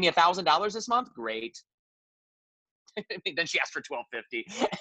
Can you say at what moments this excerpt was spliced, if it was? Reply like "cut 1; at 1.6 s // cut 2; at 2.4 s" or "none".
none